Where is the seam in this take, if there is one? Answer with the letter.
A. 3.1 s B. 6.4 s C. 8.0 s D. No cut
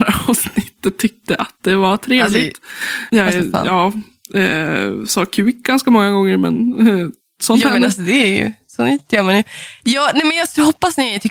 A